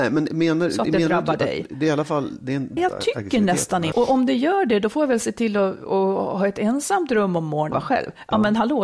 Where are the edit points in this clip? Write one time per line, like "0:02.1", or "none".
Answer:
0:02.8
0:03.9
0:07.7